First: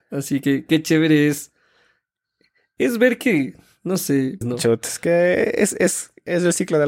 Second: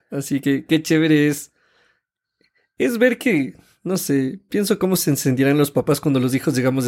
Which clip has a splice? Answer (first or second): first